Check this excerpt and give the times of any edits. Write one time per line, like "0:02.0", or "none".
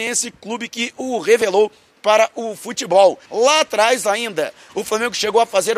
0:03.2
0:04.7

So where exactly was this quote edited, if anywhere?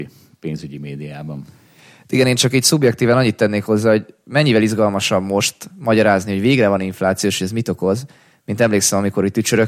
none

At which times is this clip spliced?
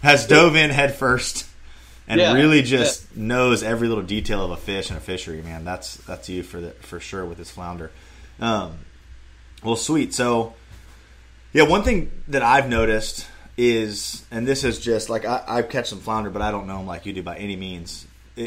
none

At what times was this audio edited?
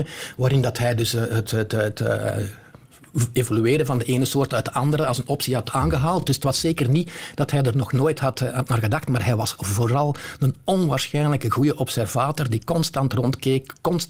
none

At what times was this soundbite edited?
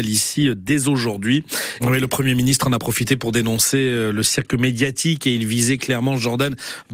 0:01.8

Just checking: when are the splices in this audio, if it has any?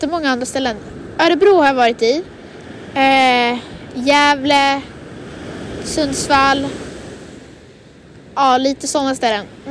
none

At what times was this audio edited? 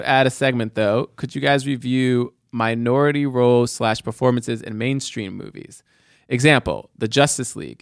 none

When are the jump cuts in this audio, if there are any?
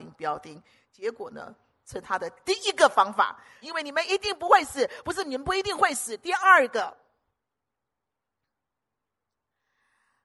0:03.6

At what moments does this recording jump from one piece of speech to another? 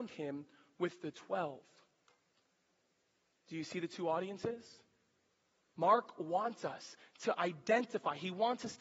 none

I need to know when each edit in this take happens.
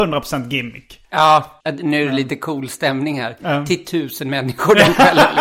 0:01.6

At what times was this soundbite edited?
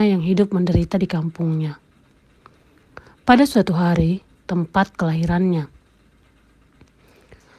0:04.4

